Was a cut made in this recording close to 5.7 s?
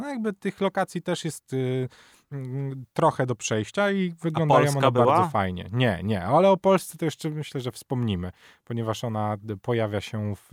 no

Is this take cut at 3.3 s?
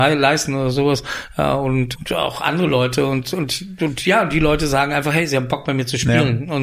no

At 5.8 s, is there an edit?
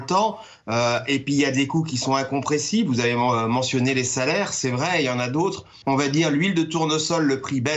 yes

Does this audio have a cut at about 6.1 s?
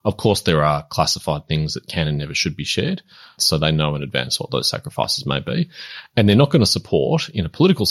no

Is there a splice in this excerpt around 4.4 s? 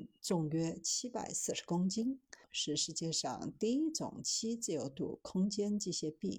no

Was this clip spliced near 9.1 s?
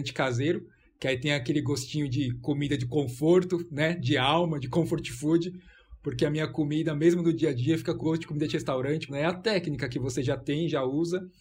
yes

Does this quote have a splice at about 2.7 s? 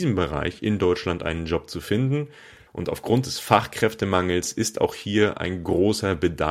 yes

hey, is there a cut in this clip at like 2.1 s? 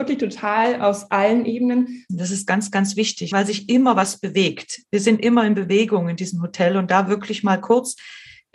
yes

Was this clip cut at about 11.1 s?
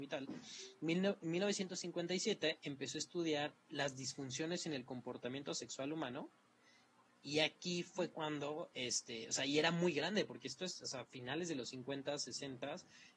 no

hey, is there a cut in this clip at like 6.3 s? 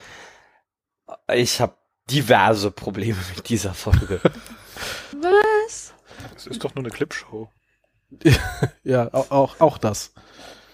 no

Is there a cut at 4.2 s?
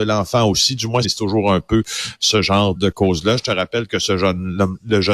no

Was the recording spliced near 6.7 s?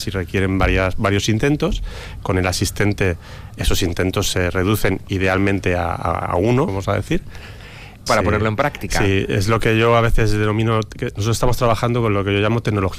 yes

